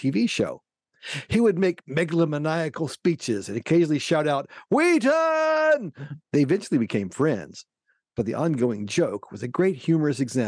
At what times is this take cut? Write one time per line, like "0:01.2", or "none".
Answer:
0:06.2